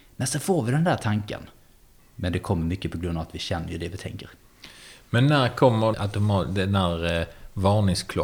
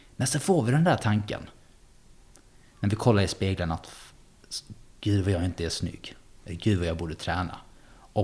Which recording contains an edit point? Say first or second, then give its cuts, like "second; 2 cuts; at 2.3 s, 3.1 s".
first; 2 cuts; at 2.0 s, 5.9 s